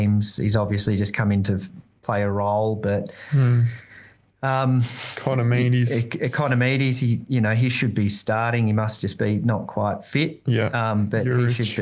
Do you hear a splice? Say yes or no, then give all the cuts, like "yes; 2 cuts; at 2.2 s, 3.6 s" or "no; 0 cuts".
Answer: no; 0 cuts